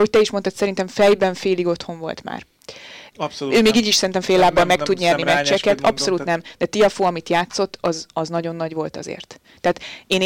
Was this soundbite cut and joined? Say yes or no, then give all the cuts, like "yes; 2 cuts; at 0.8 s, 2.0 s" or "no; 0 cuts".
yes; 1 cut; at 3.1 s